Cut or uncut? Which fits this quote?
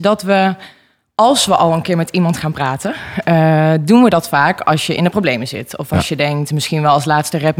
uncut